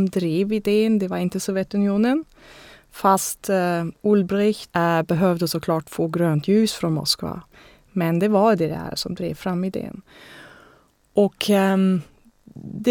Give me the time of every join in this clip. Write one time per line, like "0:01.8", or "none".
0:04.7